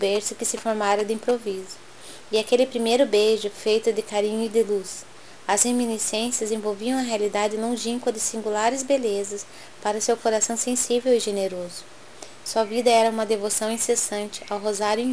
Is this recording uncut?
no; 1 cut; at 12.4 s

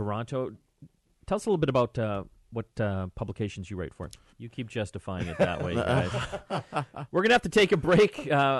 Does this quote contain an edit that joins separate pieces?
yes; 1 cut; at 4.3 s

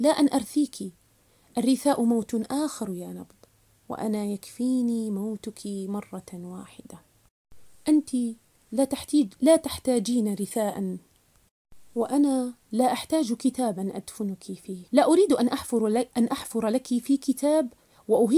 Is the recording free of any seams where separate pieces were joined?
no; 1 cut; at 14.9 s

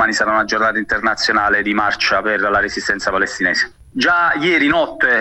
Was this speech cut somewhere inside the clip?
yes; 1 cut; at 3.9 s

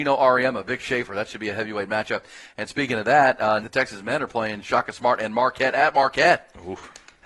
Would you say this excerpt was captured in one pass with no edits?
no; 1 cut; at 3.6 s

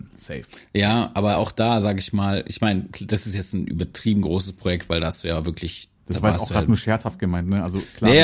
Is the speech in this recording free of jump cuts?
no; 1 cut; at 6.0 s

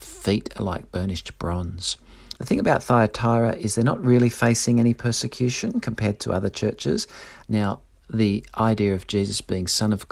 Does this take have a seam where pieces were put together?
yes; 2 cuts; at 2.3 s, 7.4 s

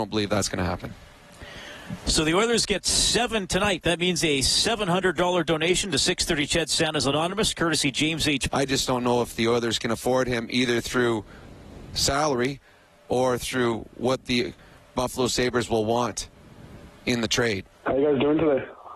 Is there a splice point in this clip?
yes; 2 cuts; at 8.5 s, 17.7 s

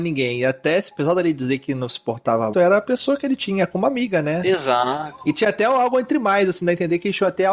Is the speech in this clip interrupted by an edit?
yes; 1 cut; at 2.5 s

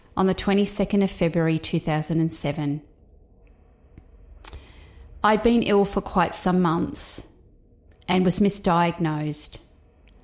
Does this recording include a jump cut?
no; 0 cuts

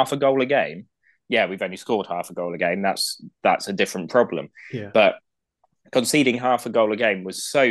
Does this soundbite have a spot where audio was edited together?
no; 0 cuts

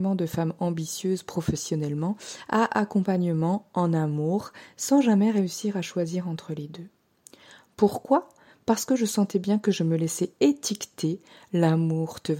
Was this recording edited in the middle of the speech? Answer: no; 0 cuts

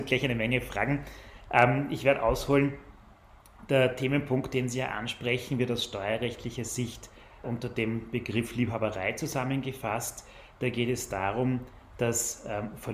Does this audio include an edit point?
yes; 1 cut; at 7.4 s

